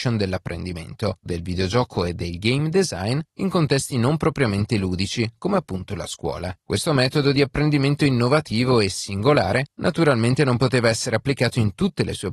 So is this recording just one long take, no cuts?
no; 1 cut; at 1.3 s

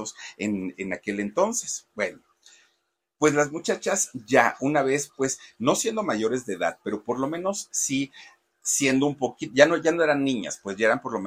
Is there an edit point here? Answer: no; 0 cuts

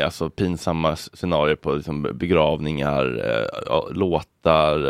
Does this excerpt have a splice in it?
no; 0 cuts

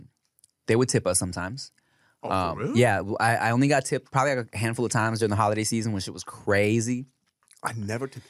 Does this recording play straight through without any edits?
yes; 0 cuts

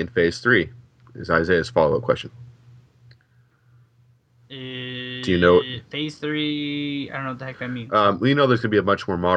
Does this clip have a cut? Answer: no; 0 cuts

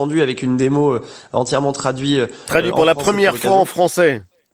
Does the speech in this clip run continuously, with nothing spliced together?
yes; 0 cuts

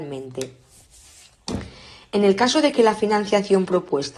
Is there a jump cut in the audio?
no; 0 cuts

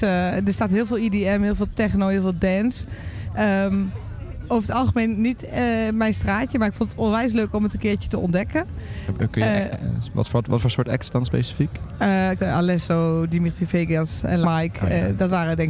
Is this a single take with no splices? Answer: no; 2 cuts; at 12.4 s, 14.4 s

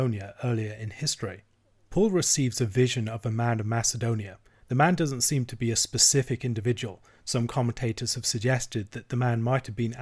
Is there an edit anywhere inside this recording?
no; 0 cuts

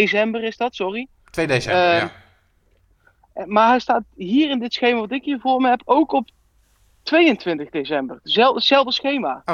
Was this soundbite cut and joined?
no; 0 cuts

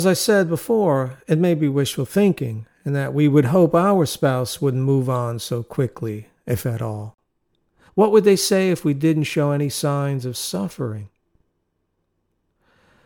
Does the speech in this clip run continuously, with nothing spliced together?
no; 1 cut; at 7.9 s

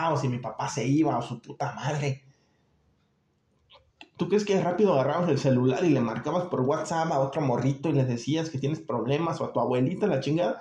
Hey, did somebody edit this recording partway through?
yes; 1 cut; at 4.2 s

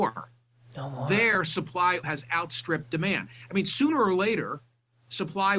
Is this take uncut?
no; 1 cut; at 2.0 s

